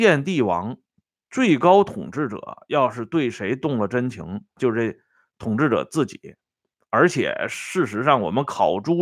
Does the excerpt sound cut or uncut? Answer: cut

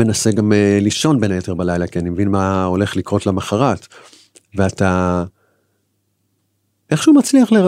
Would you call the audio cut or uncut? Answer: uncut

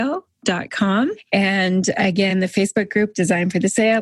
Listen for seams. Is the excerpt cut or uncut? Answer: uncut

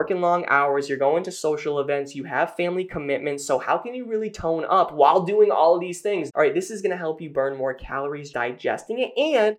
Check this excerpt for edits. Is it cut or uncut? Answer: cut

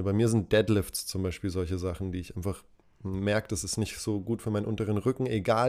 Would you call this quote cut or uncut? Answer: uncut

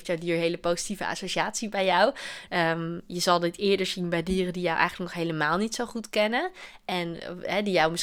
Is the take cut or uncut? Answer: cut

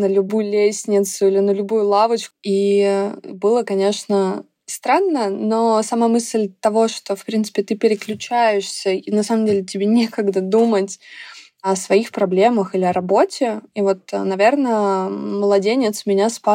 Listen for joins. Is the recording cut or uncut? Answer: cut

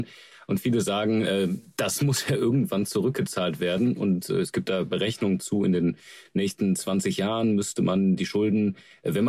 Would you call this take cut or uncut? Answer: uncut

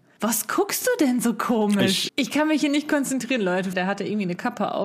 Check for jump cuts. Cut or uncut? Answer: cut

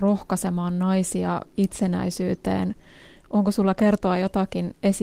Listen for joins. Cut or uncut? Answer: uncut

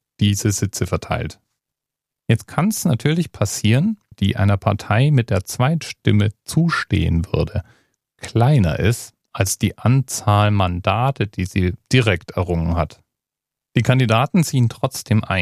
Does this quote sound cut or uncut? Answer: cut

